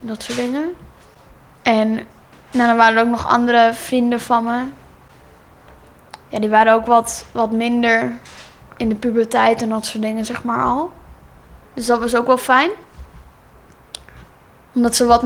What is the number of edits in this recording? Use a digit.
1